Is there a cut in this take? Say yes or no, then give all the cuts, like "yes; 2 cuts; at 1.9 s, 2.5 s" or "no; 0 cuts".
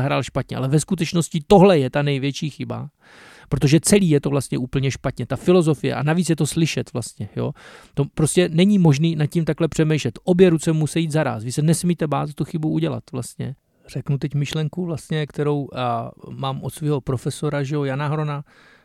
no; 0 cuts